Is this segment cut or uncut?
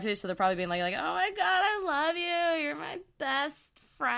uncut